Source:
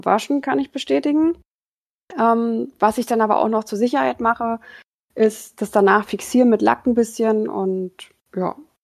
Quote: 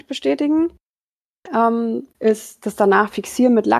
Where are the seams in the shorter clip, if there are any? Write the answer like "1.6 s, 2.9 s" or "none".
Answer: 2.1 s